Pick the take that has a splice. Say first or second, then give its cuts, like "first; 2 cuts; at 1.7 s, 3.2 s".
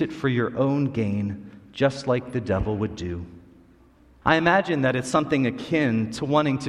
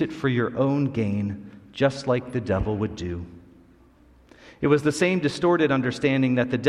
first; 1 cut; at 4.2 s